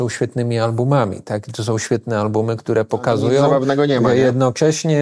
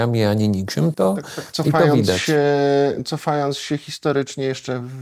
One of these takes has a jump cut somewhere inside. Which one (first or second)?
second